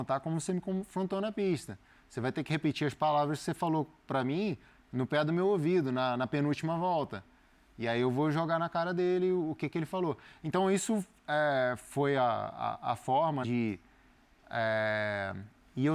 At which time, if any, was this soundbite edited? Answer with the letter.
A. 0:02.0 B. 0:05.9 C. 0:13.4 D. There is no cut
C